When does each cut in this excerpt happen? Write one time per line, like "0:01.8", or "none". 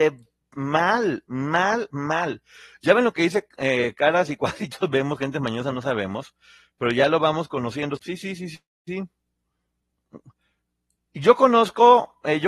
0:08.0